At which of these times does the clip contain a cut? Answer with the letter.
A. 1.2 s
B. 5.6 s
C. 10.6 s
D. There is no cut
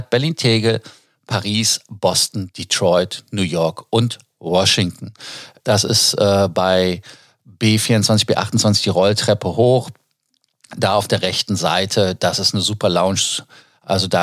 B